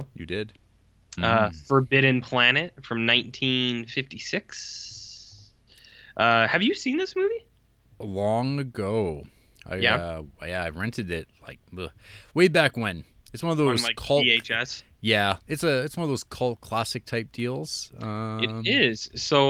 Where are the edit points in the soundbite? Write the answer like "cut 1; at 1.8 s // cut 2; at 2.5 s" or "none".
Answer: cut 1; at 1.2 s